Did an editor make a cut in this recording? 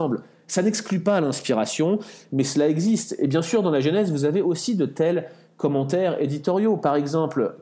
no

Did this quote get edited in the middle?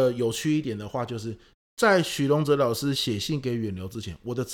no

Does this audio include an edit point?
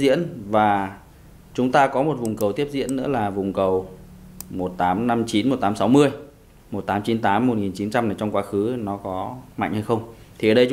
yes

